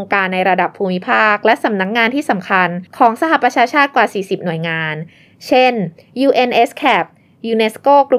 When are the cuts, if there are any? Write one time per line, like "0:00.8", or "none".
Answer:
none